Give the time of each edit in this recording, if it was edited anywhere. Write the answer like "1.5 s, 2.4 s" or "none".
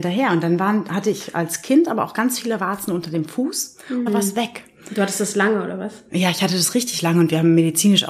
4.1 s